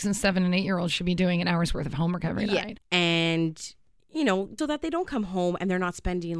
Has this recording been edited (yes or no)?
yes